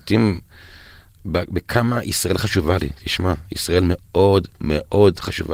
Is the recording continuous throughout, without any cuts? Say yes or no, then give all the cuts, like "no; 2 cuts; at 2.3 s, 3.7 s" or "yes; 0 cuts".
yes; 0 cuts